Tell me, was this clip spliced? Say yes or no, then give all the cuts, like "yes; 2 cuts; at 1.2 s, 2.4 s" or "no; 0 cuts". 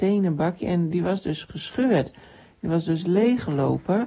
no; 0 cuts